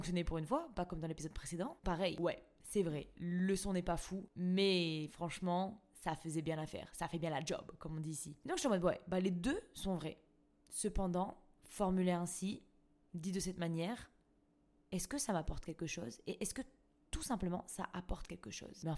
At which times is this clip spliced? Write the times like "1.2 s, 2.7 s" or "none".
1.8 s